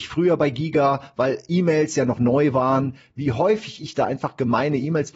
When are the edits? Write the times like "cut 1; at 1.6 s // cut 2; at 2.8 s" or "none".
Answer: none